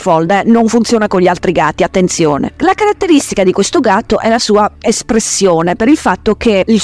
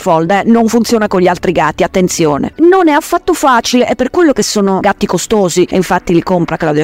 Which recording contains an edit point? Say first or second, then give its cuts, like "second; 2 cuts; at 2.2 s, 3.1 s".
second; 1 cut; at 2.5 s